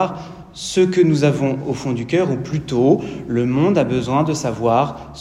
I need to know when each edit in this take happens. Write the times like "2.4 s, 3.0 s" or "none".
none